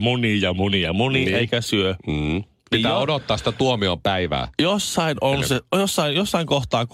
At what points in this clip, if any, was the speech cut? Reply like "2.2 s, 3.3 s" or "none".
none